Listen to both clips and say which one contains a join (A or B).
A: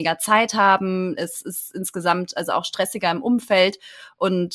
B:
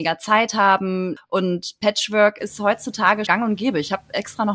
B